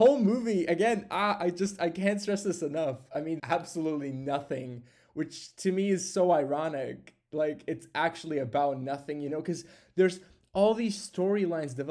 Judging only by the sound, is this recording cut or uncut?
cut